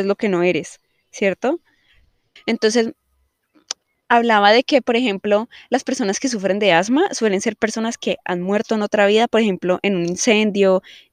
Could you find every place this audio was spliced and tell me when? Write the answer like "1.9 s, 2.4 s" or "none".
2.4 s